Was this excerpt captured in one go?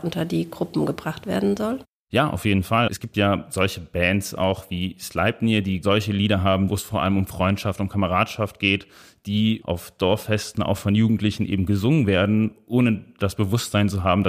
yes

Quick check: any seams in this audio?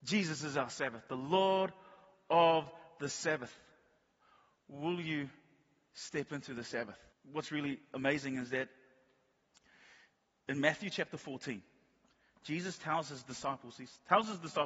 yes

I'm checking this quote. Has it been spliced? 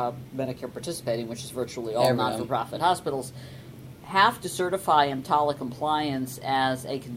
no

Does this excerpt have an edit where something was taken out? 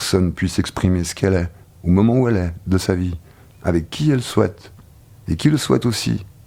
no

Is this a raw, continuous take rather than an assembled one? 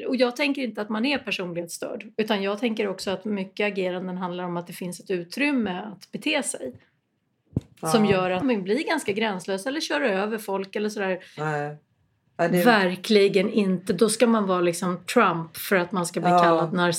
no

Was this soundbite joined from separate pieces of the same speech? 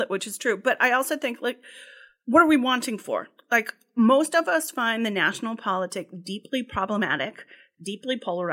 no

